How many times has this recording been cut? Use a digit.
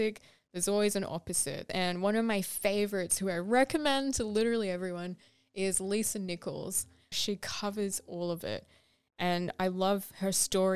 2